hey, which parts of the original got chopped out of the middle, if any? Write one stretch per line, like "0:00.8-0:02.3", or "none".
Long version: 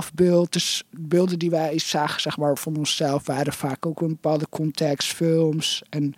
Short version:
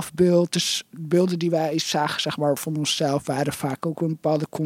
none

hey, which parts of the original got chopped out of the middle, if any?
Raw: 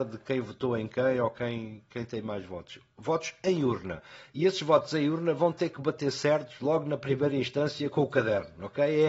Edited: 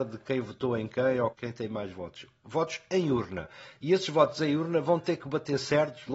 0:01.3-0:01.8

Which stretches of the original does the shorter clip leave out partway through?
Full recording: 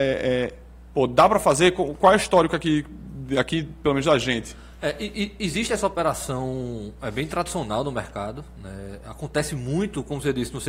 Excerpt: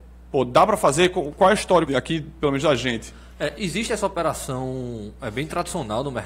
0:02.5-0:03.3
0:05.0-0:05.4

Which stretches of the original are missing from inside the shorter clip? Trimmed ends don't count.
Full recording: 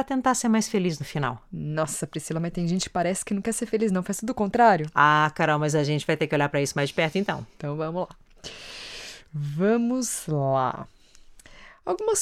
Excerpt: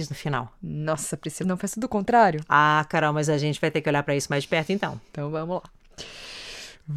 0:02.3-0:03.9

